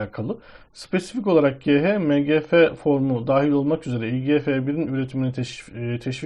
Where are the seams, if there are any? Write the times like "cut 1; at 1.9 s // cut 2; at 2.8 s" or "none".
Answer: none